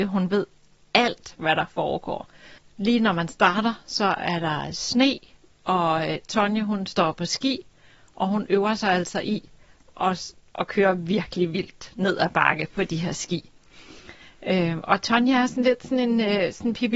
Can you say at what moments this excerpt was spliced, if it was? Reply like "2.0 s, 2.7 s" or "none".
2.6 s